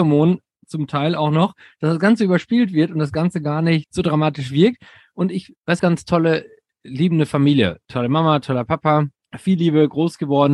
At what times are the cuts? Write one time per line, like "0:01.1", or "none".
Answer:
0:05.8